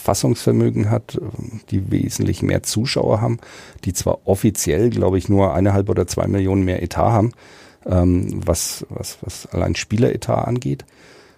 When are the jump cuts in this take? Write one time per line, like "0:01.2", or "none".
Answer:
none